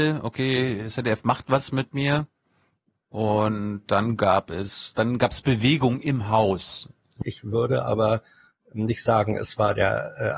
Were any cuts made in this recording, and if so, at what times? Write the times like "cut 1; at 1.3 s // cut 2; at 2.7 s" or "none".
cut 1; at 7.2 s